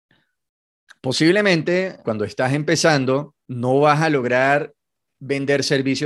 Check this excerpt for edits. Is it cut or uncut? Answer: cut